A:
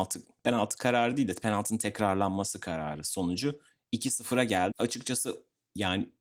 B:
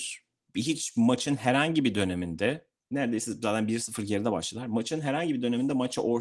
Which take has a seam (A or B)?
A